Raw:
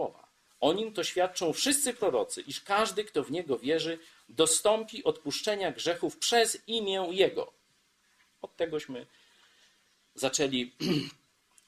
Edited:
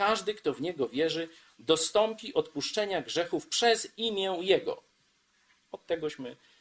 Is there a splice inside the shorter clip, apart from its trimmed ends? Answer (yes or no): no